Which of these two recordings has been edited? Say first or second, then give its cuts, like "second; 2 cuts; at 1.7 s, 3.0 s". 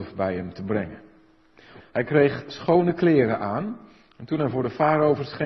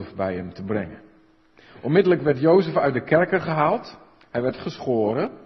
first; 1 cut; at 1.8 s